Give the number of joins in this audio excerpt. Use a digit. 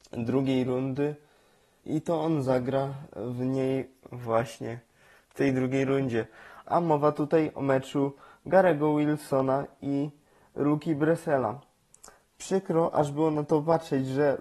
2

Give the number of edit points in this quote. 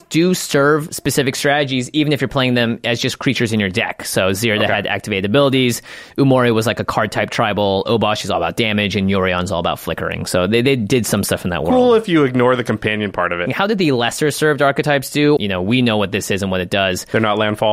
2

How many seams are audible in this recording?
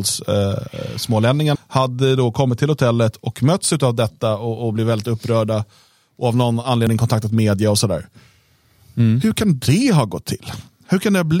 1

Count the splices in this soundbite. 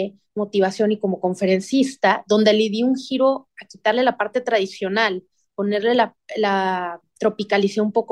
0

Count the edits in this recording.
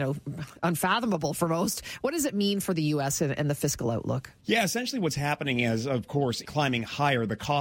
2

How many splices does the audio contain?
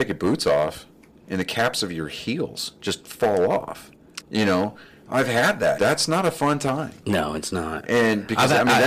2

